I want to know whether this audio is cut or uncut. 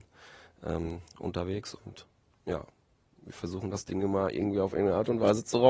uncut